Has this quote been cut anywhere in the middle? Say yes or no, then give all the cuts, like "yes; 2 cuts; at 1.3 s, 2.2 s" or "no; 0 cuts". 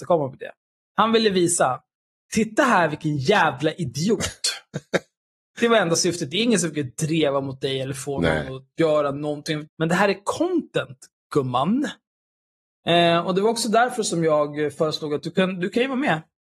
yes; 1 cut; at 9.7 s